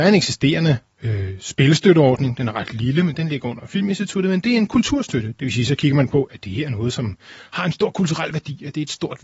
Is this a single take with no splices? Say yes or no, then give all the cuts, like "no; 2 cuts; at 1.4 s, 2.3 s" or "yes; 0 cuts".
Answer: yes; 0 cuts